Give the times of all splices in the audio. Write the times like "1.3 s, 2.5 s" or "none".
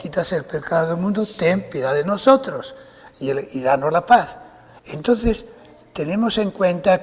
4.8 s